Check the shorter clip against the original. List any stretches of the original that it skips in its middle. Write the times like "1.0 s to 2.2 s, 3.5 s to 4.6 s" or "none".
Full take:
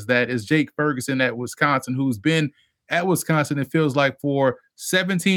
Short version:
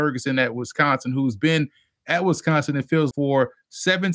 3.9 s to 4.2 s